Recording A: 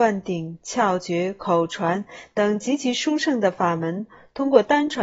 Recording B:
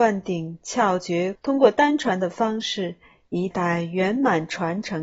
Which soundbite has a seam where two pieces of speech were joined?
B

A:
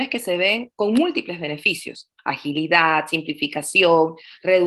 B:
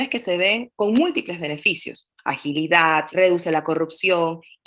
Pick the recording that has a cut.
B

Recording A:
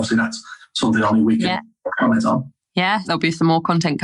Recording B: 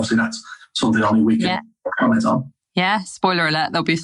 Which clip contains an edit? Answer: A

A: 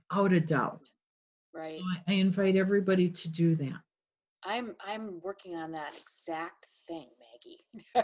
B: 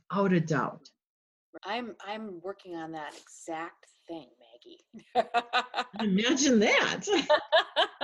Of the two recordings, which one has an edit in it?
B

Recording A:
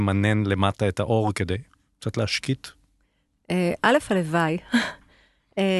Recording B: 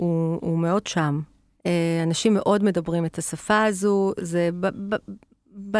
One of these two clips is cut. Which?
B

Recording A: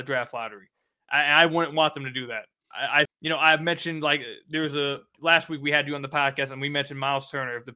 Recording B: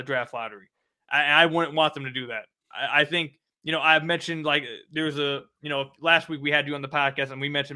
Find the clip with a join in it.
A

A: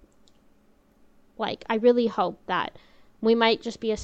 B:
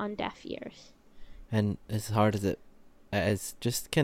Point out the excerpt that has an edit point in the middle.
B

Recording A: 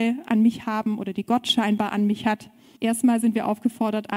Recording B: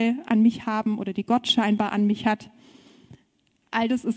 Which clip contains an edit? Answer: A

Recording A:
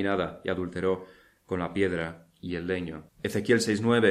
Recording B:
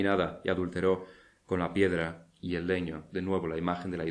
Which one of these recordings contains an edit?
A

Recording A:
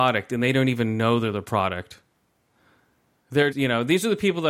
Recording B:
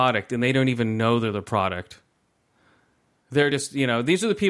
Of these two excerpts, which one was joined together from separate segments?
A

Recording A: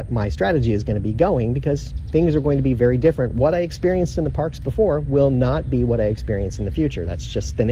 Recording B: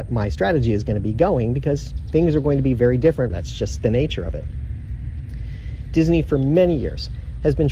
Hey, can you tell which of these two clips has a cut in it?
B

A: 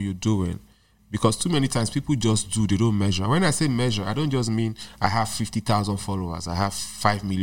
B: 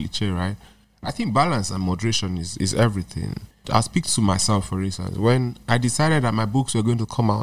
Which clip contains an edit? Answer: B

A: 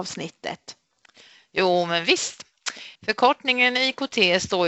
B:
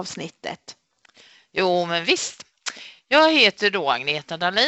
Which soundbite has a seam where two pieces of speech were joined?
A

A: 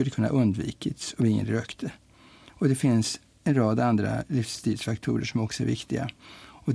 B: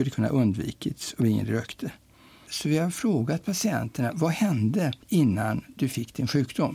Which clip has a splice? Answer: B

